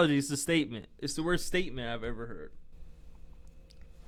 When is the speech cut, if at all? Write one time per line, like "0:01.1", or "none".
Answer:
none